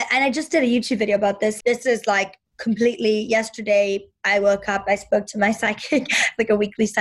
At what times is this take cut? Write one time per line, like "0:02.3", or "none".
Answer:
0:01.6